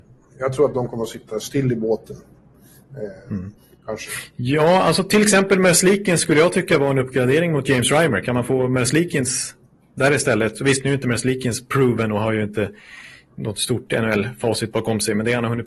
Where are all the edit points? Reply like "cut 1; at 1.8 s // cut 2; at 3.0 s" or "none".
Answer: cut 1; at 3.6 s

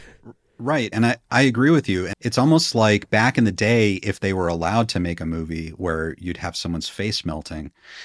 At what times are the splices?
cut 1; at 0.9 s // cut 2; at 2.1 s

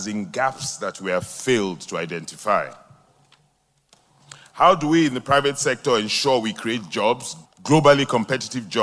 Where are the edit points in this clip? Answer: cut 1; at 7.4 s

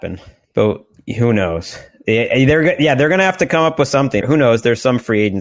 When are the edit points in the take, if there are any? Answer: cut 1; at 4.2 s

